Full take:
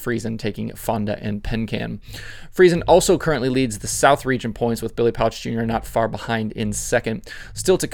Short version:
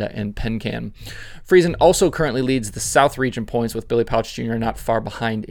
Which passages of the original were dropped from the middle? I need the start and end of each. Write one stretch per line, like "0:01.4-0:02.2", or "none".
none